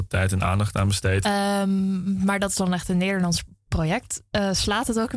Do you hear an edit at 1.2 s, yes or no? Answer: yes